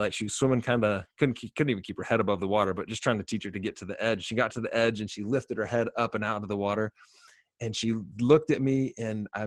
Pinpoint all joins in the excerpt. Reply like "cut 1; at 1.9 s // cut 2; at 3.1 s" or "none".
none